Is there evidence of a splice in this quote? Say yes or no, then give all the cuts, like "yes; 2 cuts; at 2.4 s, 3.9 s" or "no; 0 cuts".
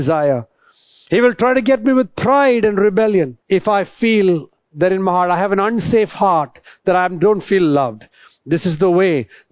yes; 1 cut; at 3.4 s